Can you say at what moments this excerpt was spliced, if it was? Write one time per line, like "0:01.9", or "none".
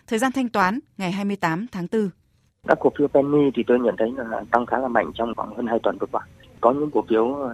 0:02.5